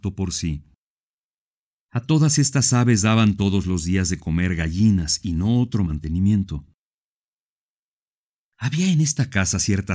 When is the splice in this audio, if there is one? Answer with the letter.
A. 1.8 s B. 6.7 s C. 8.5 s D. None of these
A